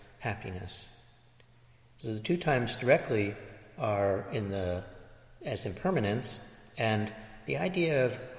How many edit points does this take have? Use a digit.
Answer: 2